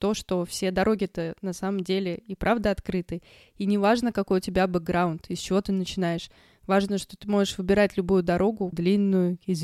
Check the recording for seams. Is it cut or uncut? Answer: cut